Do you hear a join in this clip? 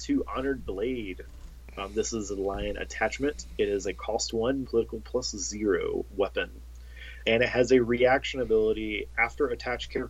yes; 2 cuts; at 4.6 s, 7.2 s

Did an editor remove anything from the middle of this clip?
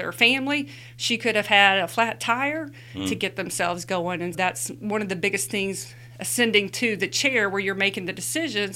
yes; 2 cuts; at 3.0 s, 4.3 s

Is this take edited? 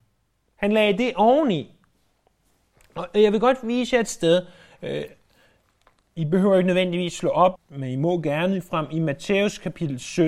yes; 1 cut; at 7.5 s

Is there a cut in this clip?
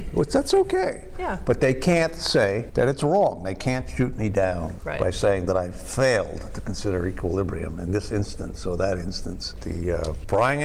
yes; 1 cut; at 9.6 s

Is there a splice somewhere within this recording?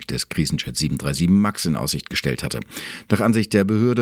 no; 0 cuts

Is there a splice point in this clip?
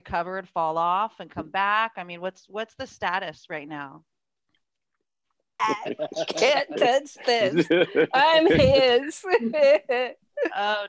yes; 1 cut; at 5.6 s

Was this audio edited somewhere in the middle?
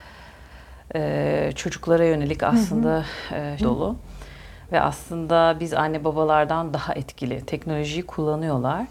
yes; 2 cuts; at 3.6 s, 4.7 s

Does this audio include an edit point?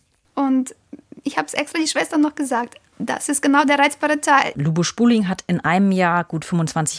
yes; 2 cuts; at 2.9 s, 4.5 s

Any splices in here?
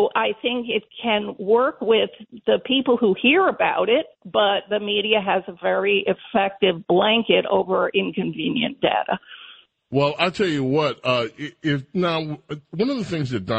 yes; 1 cut; at 9.8 s

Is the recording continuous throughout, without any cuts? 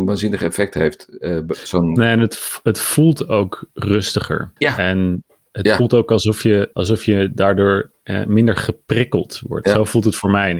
no; 2 cuts; at 4.6 s, 6.7 s

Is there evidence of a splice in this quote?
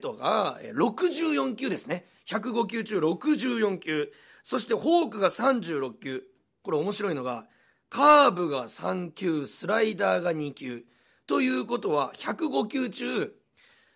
no; 0 cuts

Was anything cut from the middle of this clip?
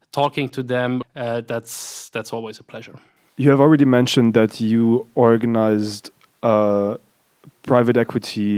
yes; 2 cuts; at 1.0 s, 3.3 s

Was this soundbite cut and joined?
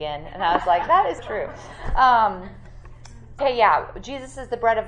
yes; 2 cuts; at 1.2 s, 3.4 s

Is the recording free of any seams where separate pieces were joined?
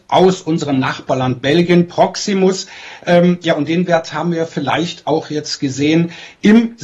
yes; 0 cuts

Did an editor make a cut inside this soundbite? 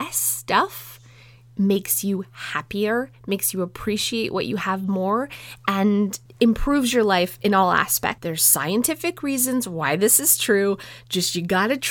yes; 2 cuts; at 6.3 s, 8.2 s

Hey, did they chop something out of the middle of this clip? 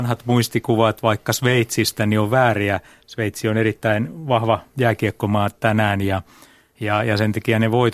no; 0 cuts

